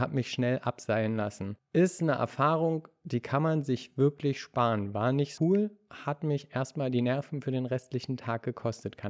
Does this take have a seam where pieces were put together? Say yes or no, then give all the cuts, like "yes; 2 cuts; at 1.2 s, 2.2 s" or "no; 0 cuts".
yes; 1 cut; at 5.4 s